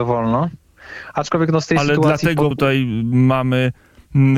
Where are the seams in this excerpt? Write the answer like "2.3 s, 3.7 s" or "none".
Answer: 2.5 s